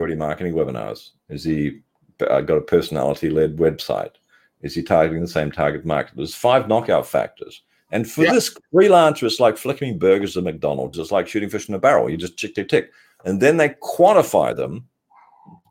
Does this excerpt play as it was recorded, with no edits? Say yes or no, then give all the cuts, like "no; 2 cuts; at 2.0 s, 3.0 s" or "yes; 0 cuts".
no; 1 cut; at 10.9 s